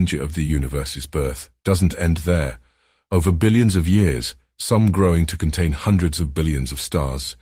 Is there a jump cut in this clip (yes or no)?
yes